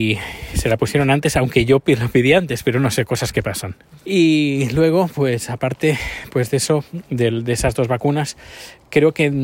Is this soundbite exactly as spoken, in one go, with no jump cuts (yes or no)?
no